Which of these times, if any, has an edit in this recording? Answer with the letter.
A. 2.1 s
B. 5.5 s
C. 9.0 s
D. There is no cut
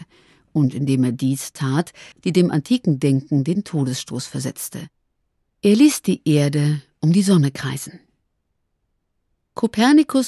A